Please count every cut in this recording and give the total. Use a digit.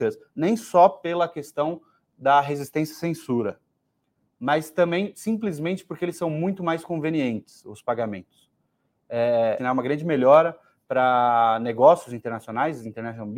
1